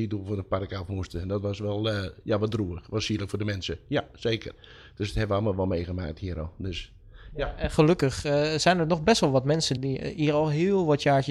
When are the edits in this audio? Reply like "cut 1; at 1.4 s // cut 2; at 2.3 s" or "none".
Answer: cut 1; at 9.8 s